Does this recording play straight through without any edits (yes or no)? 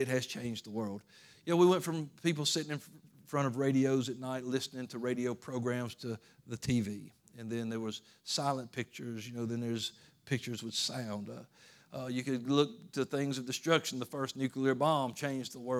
yes